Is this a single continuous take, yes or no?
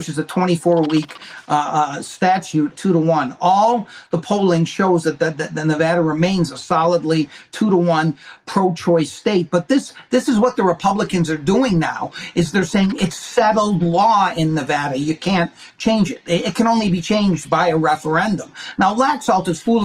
no